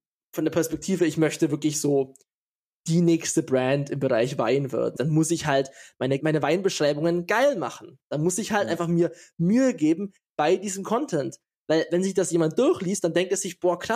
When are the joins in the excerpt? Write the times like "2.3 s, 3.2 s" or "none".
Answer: 5.0 s, 6.2 s